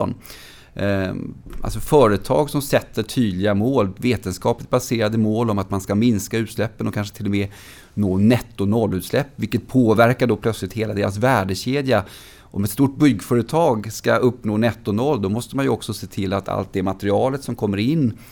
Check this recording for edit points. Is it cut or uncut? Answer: uncut